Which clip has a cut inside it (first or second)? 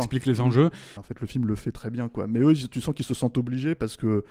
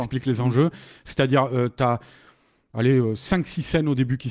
first